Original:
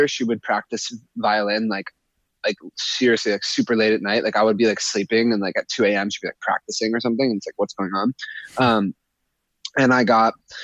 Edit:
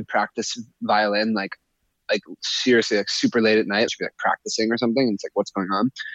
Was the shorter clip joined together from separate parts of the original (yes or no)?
yes